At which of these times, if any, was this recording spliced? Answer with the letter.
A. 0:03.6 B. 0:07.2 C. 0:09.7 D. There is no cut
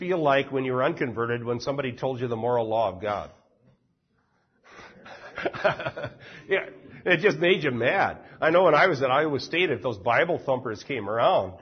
D